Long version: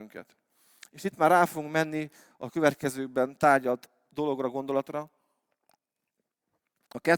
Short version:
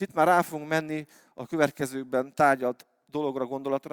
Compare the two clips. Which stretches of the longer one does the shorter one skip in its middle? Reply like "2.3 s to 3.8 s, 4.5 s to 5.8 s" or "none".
none